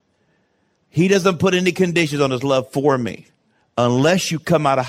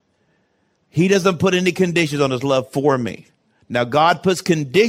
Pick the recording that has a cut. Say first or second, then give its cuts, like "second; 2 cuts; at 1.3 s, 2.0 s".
first; 1 cut; at 3.6 s